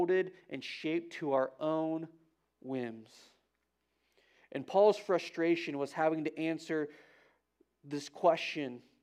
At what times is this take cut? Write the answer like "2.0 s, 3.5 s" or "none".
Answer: none